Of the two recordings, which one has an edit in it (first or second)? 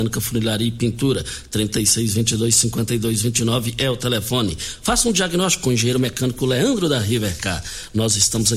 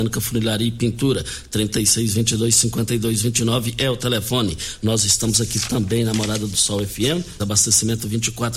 second